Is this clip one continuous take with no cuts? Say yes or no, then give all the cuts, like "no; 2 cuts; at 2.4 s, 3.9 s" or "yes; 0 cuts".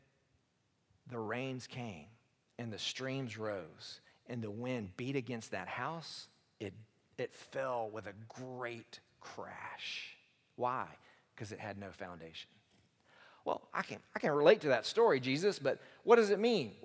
yes; 0 cuts